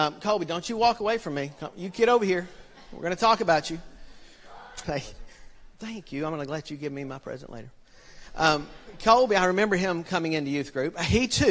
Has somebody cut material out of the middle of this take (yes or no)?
yes